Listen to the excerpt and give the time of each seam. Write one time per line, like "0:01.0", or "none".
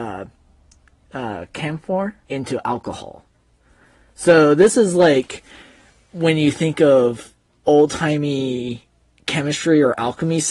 0:02.2